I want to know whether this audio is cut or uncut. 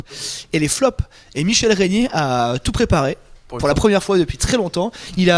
uncut